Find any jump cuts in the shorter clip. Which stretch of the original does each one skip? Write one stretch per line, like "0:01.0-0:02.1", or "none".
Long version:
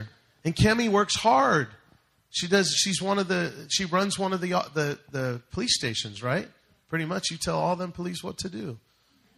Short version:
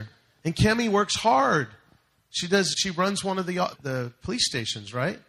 0:02.7-0:03.7
0:04.7-0:05.0